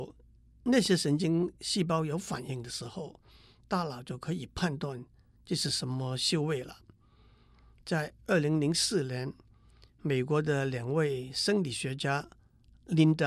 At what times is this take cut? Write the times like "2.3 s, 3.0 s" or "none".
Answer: none